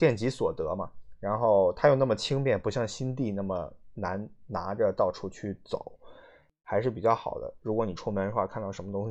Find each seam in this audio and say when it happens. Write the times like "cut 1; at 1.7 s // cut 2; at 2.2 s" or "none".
none

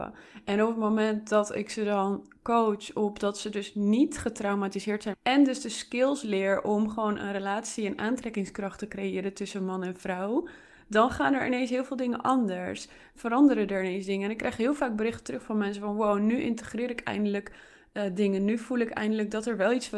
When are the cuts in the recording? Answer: cut 1; at 5.1 s

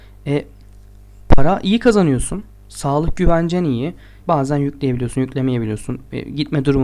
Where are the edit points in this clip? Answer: cut 1; at 4.2 s

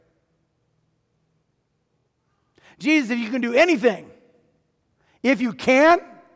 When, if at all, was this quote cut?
none

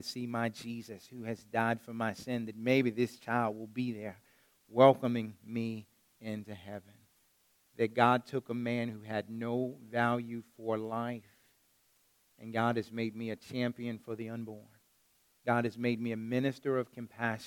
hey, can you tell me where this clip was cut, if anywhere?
none

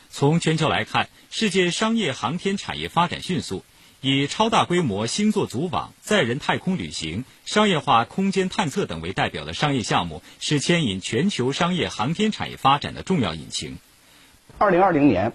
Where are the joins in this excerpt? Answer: cut 1; at 14.4 s

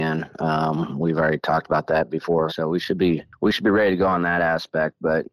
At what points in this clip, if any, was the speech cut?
cut 1; at 2.5 s

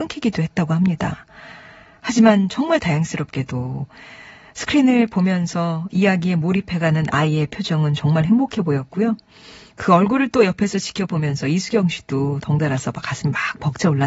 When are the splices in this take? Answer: none

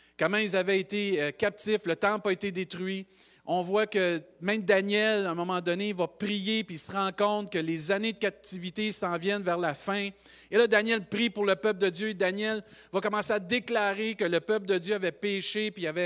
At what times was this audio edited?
none

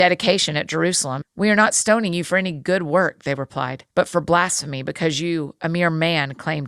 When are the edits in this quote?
cut 1; at 1.2 s // cut 2; at 3.9 s

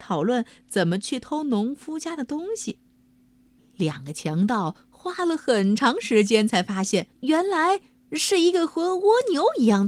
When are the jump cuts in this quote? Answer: cut 1; at 3.6 s // cut 2; at 7.1 s

